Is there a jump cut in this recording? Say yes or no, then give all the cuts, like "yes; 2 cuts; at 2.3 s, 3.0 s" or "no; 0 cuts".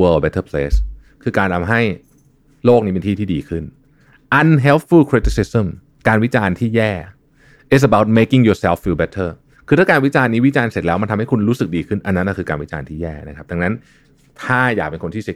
no; 0 cuts